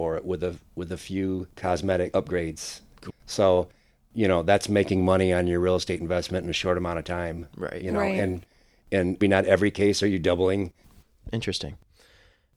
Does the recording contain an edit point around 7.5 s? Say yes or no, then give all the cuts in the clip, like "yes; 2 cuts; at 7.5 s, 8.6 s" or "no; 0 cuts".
no; 3 cuts; at 3.1 s, 9.2 s, 10.8 s